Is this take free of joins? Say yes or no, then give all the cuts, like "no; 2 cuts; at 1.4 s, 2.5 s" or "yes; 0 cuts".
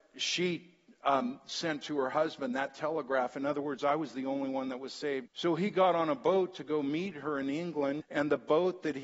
no; 2 cuts; at 5.3 s, 8.0 s